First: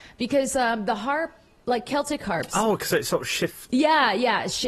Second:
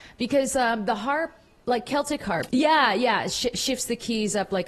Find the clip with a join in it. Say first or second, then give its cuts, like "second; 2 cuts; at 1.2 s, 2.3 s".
second; 1 cut; at 2.5 s